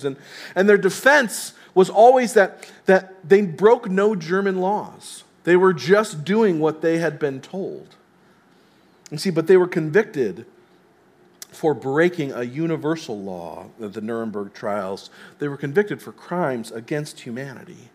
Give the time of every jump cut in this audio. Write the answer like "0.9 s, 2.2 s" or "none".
none